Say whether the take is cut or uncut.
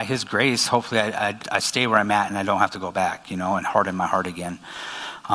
cut